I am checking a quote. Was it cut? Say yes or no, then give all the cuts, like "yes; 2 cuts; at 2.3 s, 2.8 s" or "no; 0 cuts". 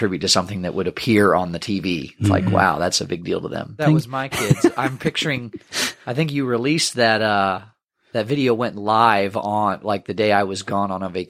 yes; 1 cut; at 3.8 s